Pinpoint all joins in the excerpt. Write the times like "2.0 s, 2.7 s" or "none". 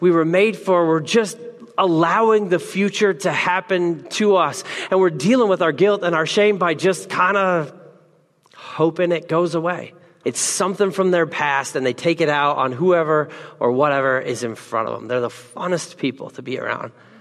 10.2 s